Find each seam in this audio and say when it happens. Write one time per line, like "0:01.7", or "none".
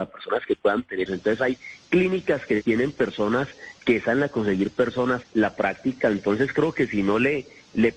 0:01.1
0:05.2